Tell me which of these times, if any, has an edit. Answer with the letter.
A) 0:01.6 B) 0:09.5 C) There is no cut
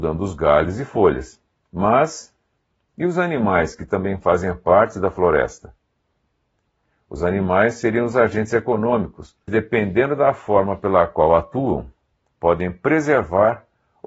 B